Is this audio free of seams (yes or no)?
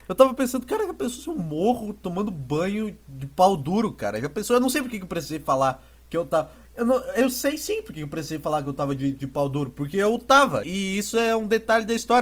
no